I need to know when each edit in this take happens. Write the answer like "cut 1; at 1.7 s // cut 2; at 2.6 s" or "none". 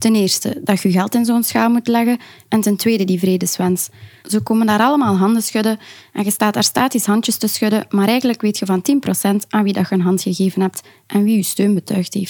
cut 1; at 4.2 s